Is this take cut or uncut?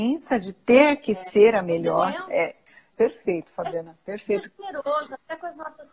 cut